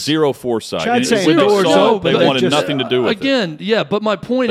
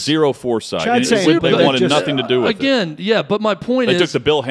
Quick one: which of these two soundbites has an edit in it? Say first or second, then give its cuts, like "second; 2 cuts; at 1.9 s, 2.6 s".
second; 1 cut; at 1.4 s